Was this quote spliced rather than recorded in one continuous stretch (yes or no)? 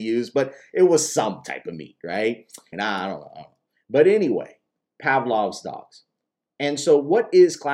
yes